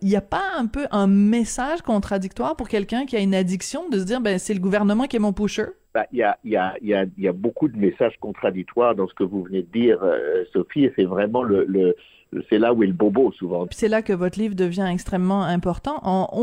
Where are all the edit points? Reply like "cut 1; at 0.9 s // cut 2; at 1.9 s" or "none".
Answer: cut 1; at 13.7 s